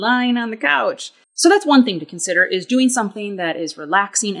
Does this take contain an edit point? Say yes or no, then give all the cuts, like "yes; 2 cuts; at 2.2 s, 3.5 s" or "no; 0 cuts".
yes; 1 cut; at 1.2 s